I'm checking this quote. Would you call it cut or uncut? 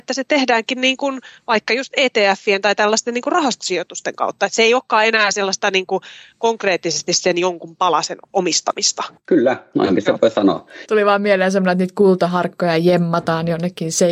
cut